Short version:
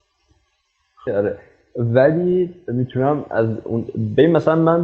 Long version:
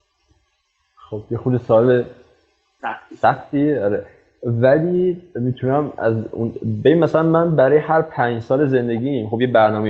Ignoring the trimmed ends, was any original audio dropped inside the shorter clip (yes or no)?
yes